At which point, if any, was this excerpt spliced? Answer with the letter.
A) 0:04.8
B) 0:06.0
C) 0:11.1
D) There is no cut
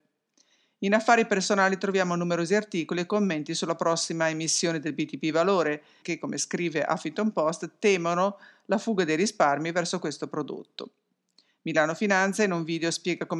B